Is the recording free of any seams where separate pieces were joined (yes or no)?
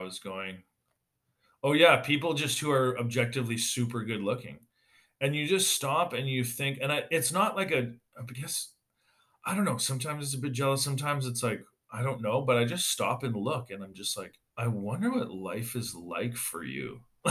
no